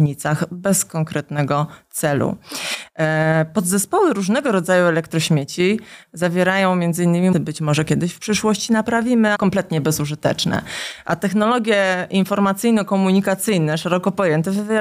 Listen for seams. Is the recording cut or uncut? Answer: cut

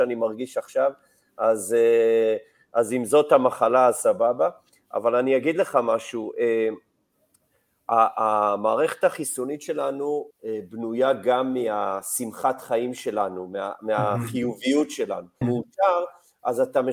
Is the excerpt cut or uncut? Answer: cut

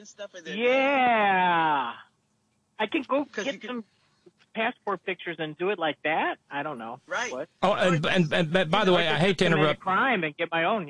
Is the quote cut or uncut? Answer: uncut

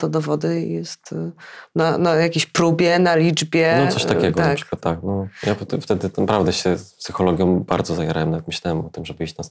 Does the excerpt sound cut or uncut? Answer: uncut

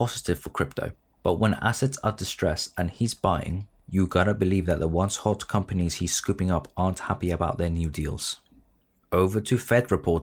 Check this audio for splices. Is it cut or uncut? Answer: uncut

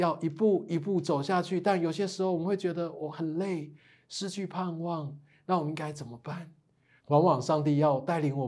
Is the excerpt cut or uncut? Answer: cut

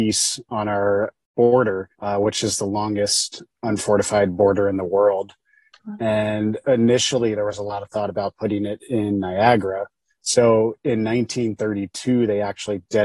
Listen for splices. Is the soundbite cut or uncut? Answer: cut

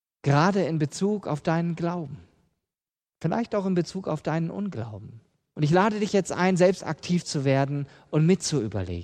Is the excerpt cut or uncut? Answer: cut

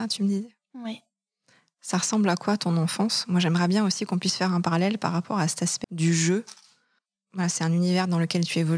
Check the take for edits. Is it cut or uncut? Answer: cut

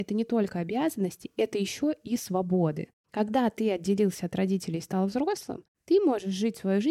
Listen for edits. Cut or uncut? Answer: uncut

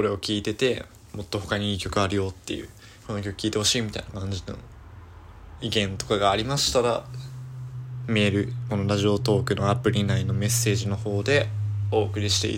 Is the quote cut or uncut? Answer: cut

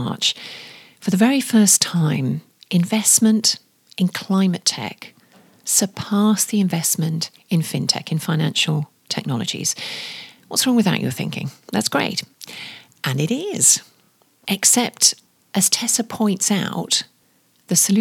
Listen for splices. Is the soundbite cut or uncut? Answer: uncut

